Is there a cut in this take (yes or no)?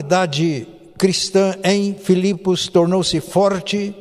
no